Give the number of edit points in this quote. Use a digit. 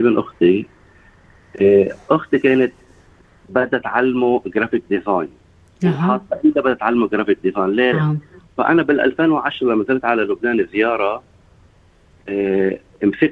1